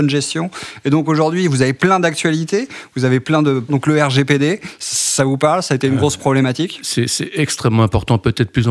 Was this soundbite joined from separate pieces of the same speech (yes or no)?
yes